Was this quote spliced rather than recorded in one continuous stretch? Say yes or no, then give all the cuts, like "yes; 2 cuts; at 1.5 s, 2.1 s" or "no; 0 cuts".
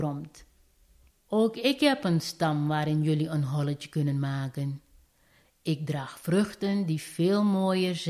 yes; 1 cut; at 1.1 s